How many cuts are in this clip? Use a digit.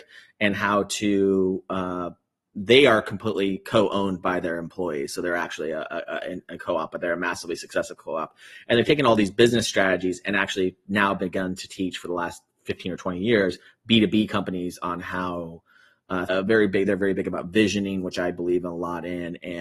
1